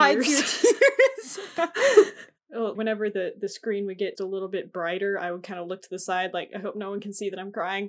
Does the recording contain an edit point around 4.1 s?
yes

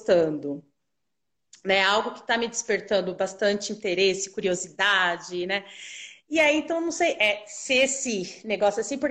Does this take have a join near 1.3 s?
no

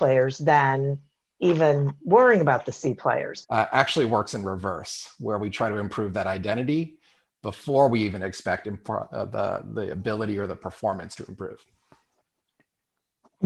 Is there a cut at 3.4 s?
yes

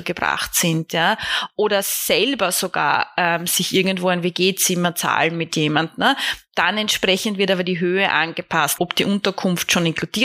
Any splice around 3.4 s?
no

